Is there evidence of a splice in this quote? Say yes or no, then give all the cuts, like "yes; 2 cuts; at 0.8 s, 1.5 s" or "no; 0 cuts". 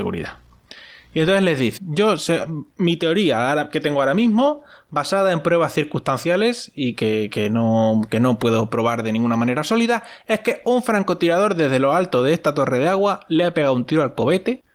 yes; 1 cut; at 1.8 s